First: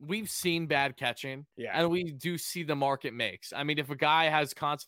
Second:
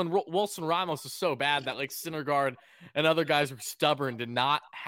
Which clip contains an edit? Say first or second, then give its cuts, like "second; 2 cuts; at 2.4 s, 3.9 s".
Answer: first; 1 cut; at 1.5 s